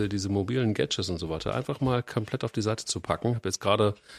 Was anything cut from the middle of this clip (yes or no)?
no